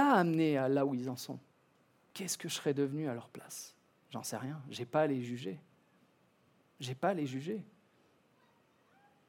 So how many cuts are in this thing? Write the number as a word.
one